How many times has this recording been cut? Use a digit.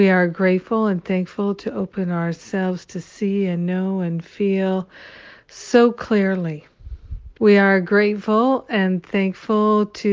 1